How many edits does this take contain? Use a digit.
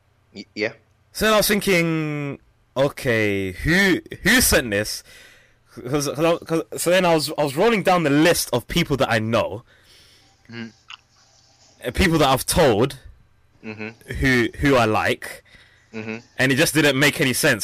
0